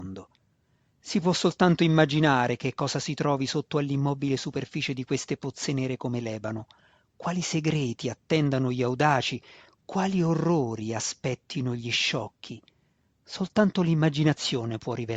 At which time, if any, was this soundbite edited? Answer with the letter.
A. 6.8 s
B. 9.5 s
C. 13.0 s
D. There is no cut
D